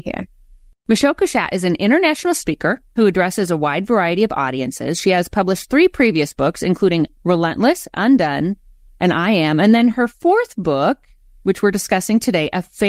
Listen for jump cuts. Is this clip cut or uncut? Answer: uncut